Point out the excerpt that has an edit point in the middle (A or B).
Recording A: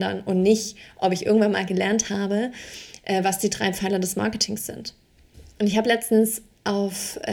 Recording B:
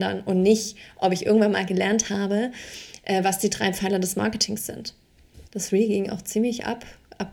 B